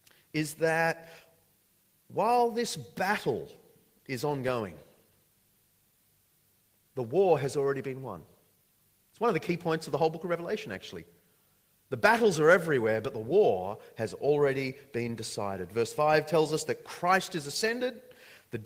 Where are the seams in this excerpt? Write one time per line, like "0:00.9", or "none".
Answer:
none